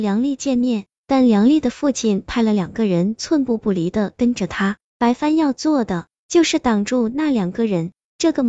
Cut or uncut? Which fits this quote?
uncut